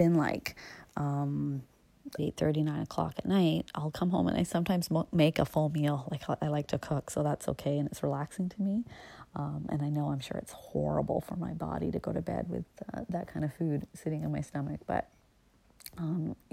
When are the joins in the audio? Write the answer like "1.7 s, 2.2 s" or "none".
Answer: 2.2 s